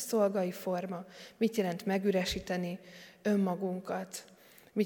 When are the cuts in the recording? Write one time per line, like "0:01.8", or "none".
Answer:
none